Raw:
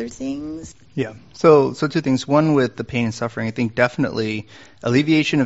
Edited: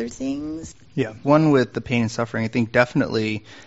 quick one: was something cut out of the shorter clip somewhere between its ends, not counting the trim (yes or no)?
yes